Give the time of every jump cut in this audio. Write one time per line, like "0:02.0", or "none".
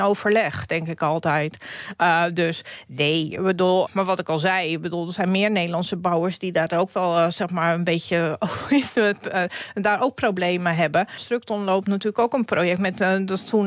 0:03.9
0:11.2